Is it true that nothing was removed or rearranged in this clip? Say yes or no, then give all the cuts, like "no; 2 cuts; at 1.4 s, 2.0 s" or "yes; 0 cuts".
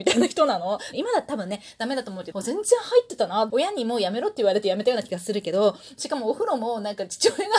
no; 3 cuts; at 0.9 s, 2.3 s, 3.5 s